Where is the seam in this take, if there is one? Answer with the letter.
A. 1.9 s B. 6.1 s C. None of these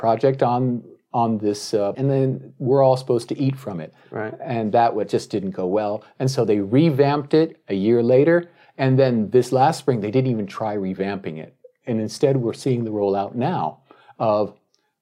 A